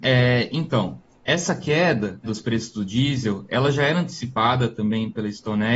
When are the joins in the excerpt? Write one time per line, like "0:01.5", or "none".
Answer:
0:02.2

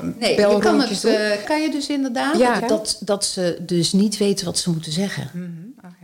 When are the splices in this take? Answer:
0:01.4
0:02.6

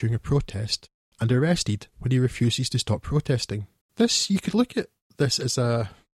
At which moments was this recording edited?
0:01.1
0:03.8

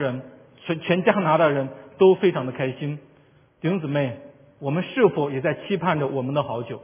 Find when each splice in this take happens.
none

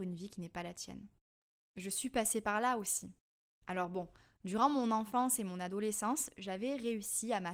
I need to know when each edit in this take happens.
none

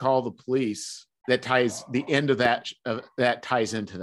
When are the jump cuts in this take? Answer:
0:01.2

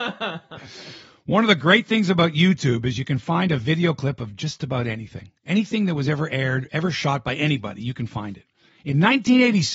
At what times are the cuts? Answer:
none

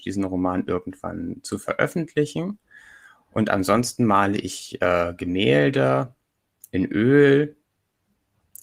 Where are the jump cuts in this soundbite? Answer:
none

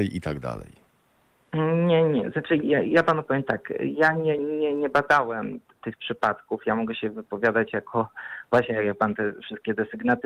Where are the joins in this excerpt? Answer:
none

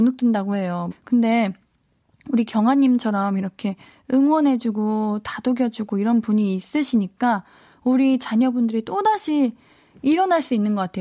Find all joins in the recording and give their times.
0:00.9

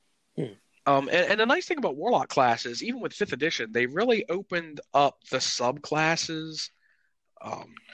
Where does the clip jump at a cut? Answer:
none

